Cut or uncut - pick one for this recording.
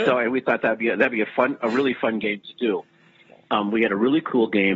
uncut